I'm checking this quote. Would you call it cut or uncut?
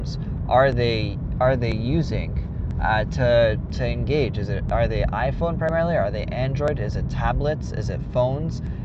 uncut